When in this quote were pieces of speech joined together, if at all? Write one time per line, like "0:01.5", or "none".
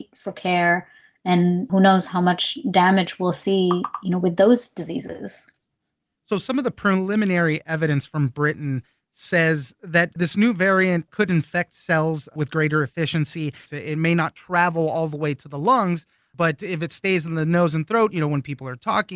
0:13.6